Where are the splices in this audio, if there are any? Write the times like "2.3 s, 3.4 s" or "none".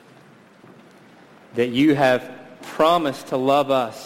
none